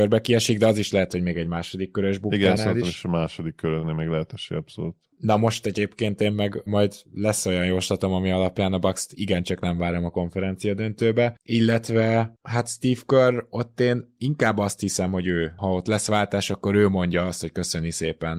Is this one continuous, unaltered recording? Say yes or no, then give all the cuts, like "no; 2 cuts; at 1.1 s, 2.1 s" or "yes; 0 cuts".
yes; 0 cuts